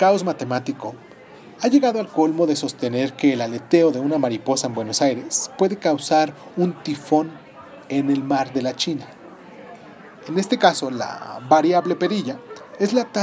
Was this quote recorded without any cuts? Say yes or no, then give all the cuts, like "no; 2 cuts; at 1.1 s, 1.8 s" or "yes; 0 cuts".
no; 1 cut; at 10.1 s